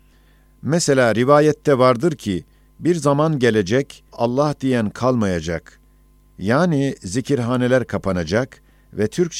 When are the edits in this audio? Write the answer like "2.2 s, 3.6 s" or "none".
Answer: 4.1 s